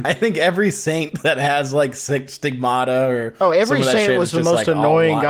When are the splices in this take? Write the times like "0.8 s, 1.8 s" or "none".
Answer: none